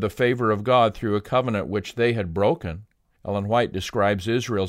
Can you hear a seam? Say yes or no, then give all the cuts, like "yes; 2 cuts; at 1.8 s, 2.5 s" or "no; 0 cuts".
yes; 1 cut; at 3.2 s